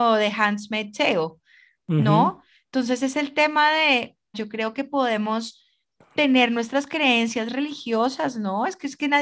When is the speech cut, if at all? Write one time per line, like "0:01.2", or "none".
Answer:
0:04.3